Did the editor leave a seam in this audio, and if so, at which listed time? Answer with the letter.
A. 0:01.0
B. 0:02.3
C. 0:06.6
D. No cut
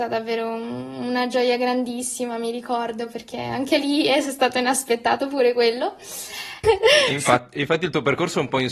C